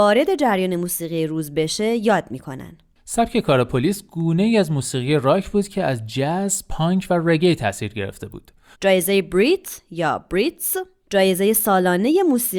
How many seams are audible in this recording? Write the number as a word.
one